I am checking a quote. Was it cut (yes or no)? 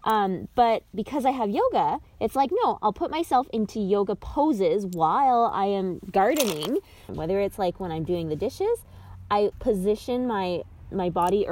yes